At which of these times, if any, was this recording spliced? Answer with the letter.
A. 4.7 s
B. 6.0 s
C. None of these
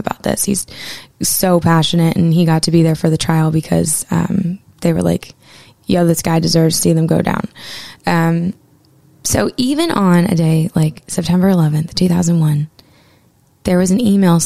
C